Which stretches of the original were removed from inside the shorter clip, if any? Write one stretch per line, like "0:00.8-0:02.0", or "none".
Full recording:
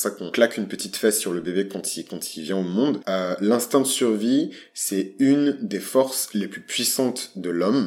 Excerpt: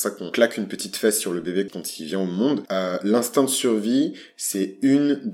0:01.7-0:02.1